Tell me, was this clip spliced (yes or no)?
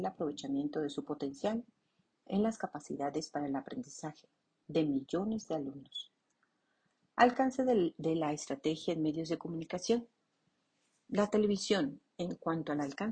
no